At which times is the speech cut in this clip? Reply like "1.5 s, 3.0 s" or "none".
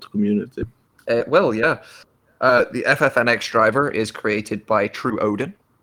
none